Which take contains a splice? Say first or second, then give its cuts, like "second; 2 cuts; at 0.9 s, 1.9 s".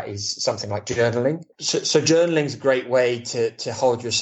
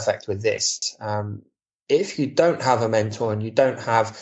first; 1 cut; at 1.5 s